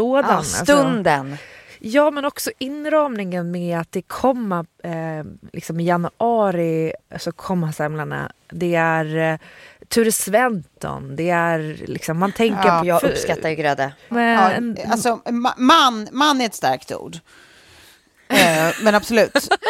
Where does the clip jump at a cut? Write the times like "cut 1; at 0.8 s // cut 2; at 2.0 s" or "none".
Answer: cut 1; at 12.8 s // cut 2; at 14.1 s